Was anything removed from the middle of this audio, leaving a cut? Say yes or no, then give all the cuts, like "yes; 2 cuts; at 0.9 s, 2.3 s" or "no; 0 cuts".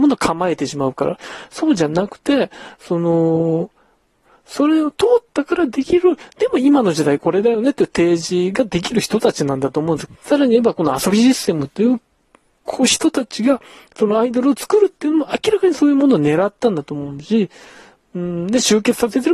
yes; 1 cut; at 10.1 s